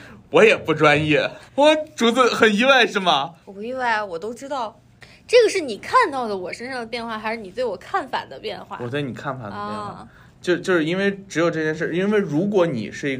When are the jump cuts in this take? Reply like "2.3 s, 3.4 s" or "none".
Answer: 1.5 s, 3.4 s